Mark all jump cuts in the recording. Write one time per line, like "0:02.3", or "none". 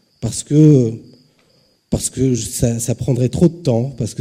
none